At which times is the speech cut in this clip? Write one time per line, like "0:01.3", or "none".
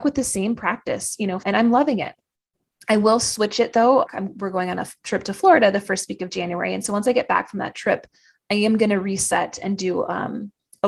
0:01.4
0:04.1